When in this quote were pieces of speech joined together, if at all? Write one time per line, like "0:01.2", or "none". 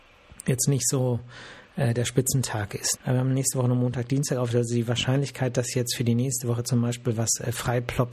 0:03.0